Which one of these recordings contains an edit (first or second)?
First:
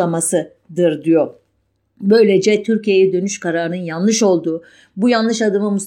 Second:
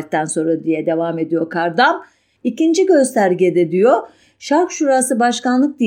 second